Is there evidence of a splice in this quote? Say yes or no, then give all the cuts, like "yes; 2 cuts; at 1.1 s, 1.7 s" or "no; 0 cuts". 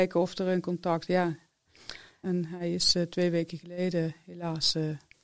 yes; 1 cut; at 2.2 s